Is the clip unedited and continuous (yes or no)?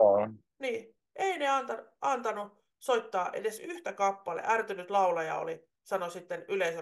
yes